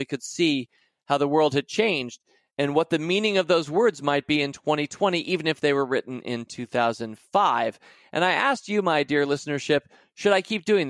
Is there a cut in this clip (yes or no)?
no